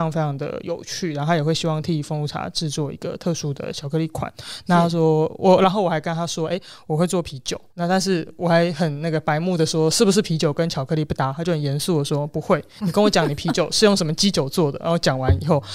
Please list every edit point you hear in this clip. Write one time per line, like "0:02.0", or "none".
0:07.7